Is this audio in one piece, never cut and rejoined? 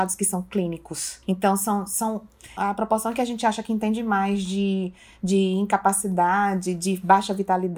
no; 2 cuts; at 1.2 s, 2.6 s

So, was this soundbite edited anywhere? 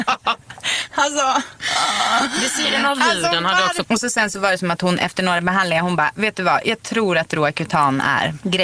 yes; 1 cut; at 3.8 s

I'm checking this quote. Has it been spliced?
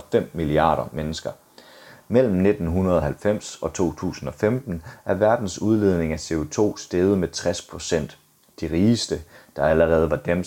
no; 0 cuts

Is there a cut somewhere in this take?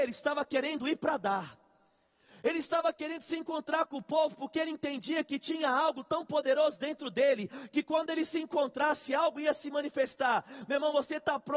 no; 0 cuts

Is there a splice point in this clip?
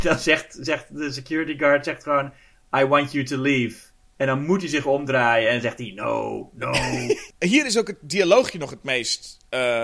yes; 1 cut; at 4.0 s

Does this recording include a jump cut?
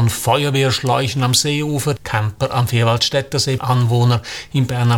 yes; 2 cuts; at 2.0 s, 3.6 s

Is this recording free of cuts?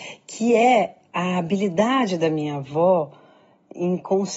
yes; 0 cuts

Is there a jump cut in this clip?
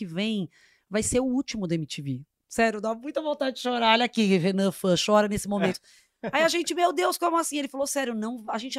no; 0 cuts

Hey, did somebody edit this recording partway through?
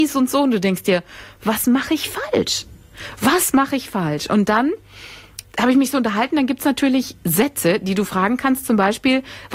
yes; 1 cut; at 5.4 s

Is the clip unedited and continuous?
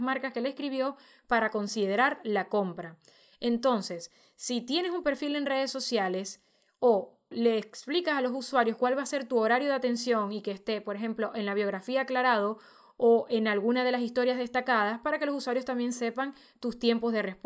no; 1 cut; at 7.3 s

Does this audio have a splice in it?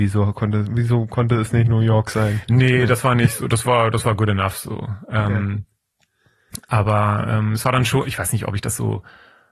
no; 0 cuts

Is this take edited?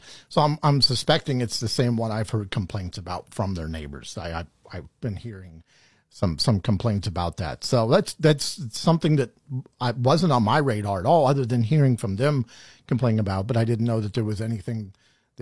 no; 0 cuts

